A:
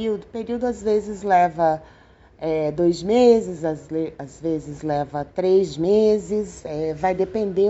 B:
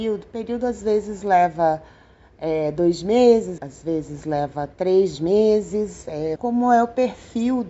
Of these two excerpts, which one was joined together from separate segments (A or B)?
B